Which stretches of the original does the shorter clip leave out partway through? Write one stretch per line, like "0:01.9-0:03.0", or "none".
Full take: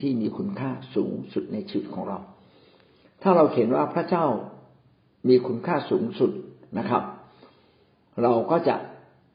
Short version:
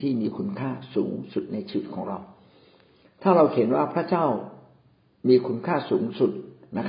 none